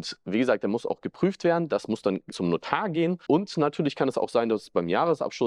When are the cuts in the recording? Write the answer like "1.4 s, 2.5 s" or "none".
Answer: 3.3 s